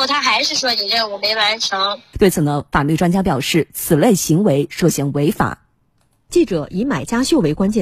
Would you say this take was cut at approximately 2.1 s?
yes; 1 cut; at 2.1 s

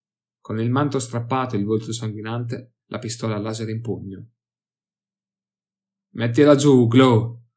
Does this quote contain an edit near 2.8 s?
yes; 1 cut; at 2.8 s

